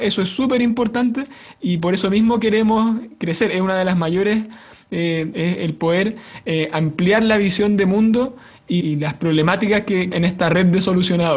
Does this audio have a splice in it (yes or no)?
yes